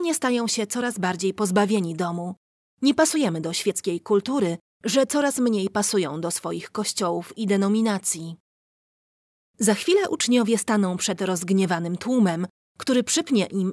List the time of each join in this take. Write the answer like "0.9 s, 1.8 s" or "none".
4.7 s, 9.5 s

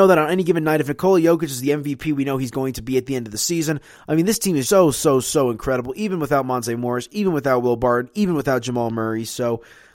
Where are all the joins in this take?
4.7 s

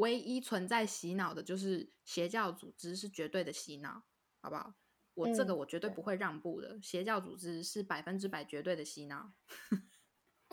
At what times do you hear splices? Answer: none

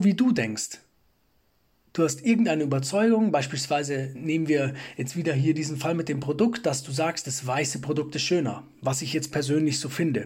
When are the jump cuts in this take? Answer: none

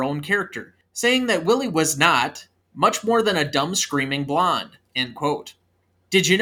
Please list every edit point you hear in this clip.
2.6 s, 4.9 s

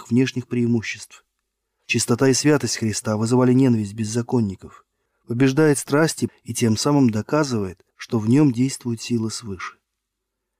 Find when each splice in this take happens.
5.1 s, 6.3 s, 7.9 s

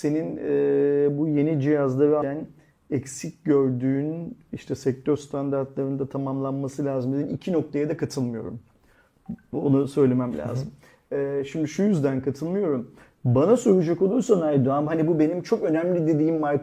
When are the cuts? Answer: 2.2 s

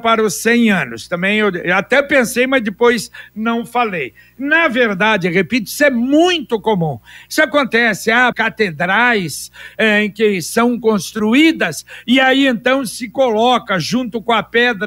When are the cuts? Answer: 8.3 s

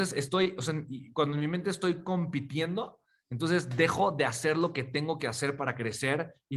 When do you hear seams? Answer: none

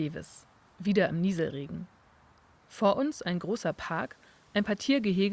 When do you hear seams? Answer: none

